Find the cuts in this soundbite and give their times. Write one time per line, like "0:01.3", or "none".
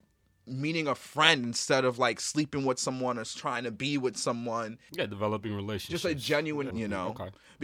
0:04.9
0:06.7